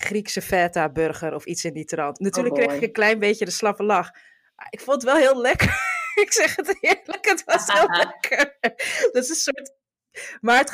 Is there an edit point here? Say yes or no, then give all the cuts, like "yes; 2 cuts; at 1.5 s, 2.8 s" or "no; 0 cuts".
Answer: no; 0 cuts